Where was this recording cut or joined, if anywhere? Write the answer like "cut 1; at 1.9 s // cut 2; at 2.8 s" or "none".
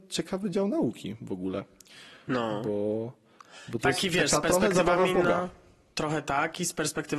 none